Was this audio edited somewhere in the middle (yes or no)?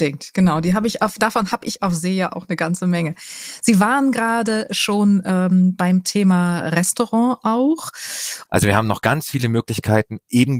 yes